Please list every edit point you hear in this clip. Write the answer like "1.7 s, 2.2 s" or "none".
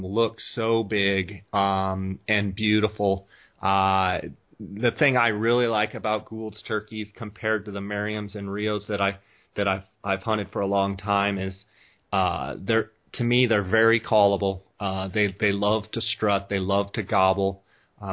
none